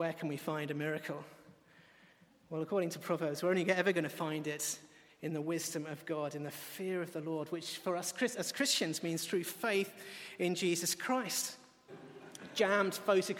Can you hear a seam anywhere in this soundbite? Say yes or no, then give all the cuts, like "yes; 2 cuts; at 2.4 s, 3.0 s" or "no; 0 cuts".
yes; 1 cut; at 11.9 s